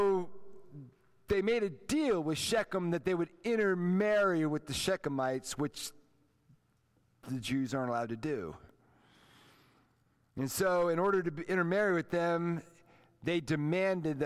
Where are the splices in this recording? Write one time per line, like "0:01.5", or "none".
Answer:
none